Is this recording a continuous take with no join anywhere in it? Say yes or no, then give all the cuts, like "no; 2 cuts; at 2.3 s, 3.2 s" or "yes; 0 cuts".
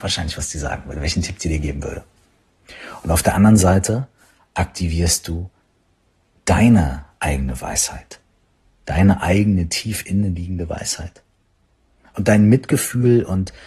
yes; 0 cuts